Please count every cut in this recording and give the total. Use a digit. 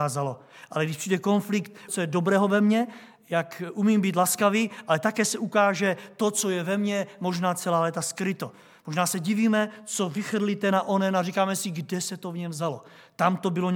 1